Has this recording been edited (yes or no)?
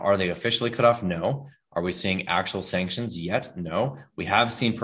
no